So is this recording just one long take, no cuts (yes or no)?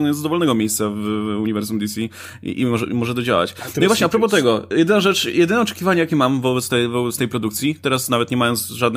yes